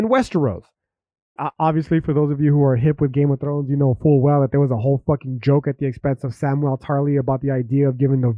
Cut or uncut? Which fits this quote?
cut